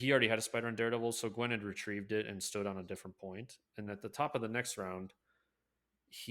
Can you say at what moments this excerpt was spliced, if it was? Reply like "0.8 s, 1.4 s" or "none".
3.9 s